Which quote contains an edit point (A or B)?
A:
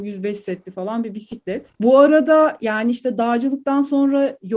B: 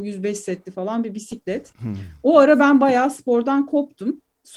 B